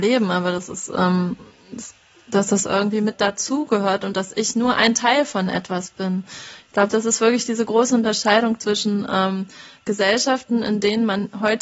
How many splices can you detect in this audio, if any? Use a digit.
0